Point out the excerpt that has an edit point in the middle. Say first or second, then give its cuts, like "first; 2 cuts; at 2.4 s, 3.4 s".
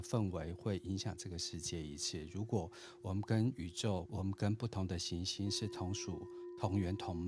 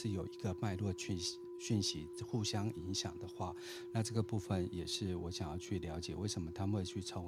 first; 1 cut; at 4.1 s